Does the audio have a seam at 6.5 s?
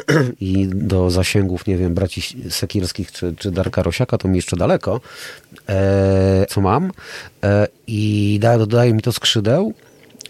yes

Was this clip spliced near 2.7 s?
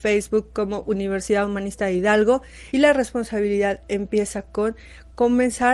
yes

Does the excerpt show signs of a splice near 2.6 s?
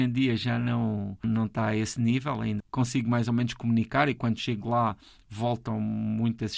yes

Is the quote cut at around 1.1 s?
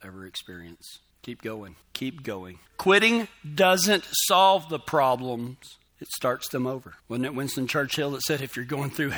no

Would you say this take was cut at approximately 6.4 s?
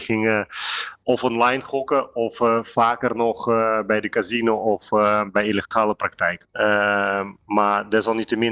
yes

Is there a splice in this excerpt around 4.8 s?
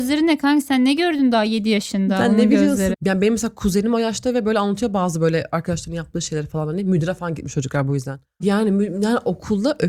no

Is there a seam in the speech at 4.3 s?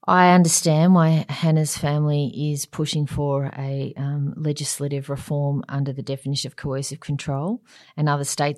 no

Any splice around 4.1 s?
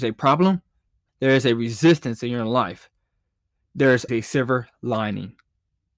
yes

